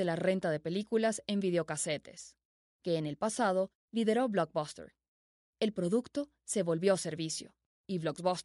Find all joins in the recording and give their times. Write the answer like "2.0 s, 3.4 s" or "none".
5.4 s

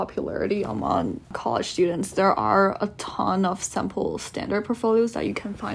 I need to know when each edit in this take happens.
1.2 s

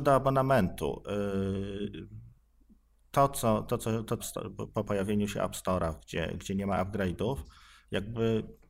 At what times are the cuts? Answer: 4.2 s

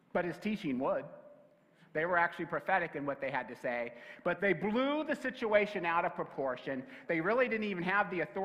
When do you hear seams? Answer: 4.4 s, 7.1 s

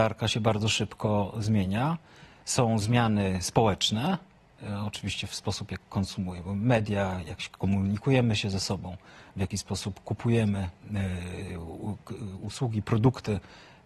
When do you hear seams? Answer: none

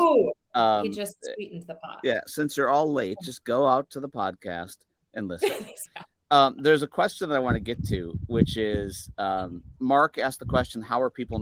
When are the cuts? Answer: 5.9 s, 9.8 s

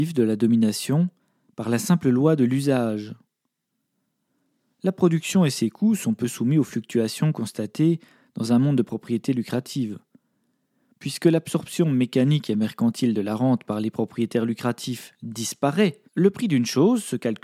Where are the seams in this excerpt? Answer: 16.1 s

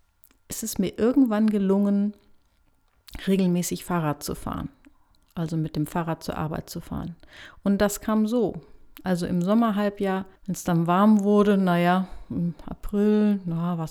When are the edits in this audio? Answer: 9.0 s, 10.4 s

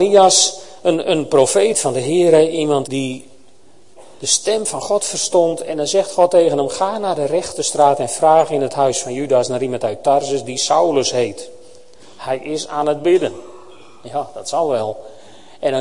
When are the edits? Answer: 2.8 s

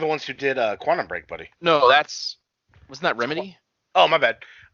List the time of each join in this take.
1.5 s

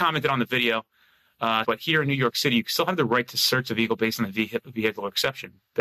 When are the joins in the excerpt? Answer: 1.6 s

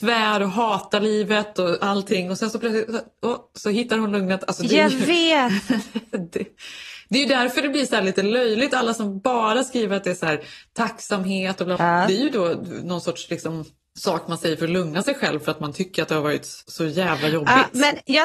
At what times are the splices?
11.8 s, 16.6 s

